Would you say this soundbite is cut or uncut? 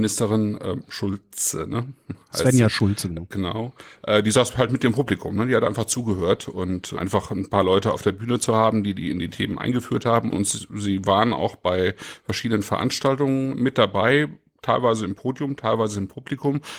cut